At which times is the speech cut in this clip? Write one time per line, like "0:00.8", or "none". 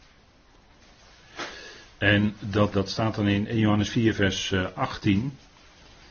0:02.7